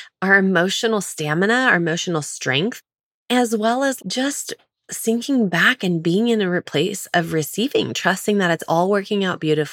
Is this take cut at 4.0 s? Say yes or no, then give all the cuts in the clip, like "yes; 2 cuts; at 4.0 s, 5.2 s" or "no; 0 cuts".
yes; 1 cut; at 4.0 s